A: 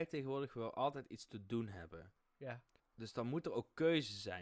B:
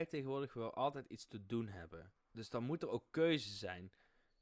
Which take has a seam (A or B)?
B